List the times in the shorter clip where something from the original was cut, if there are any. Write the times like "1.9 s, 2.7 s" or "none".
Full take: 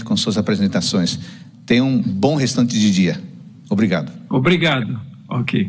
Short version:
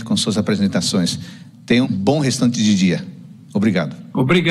1.8 s